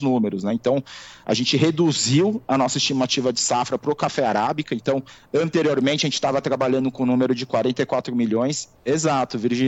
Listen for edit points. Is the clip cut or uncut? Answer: cut